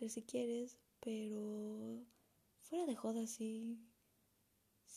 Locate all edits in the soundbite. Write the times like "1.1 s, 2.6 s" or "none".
none